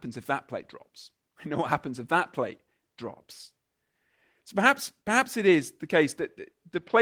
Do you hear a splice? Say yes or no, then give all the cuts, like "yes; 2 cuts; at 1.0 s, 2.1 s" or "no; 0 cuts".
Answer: yes; 1 cut; at 1.3 s